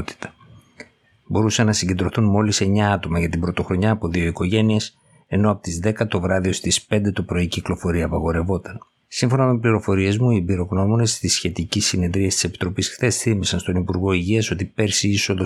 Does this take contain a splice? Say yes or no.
yes